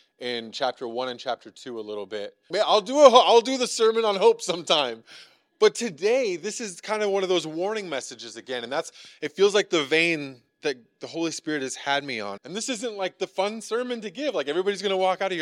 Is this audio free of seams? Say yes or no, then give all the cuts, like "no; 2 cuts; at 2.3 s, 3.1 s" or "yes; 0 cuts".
no; 2 cuts; at 2.5 s, 12.4 s